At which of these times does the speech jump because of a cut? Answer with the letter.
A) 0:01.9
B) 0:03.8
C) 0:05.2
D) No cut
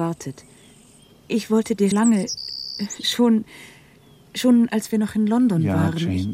A